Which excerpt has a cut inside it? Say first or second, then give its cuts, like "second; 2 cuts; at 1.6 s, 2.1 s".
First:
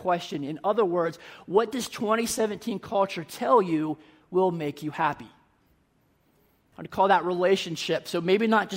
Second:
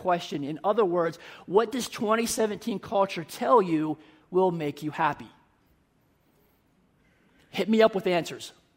first; 1 cut; at 6.7 s